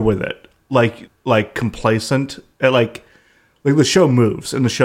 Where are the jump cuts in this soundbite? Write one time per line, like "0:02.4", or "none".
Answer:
0:01.1